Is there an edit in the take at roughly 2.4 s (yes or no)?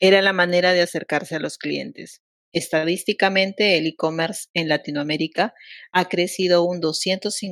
yes